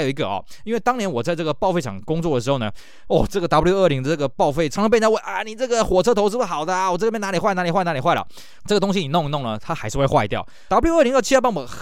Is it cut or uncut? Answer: cut